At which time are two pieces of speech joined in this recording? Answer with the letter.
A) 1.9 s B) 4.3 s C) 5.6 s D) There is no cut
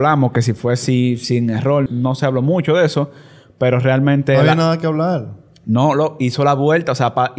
A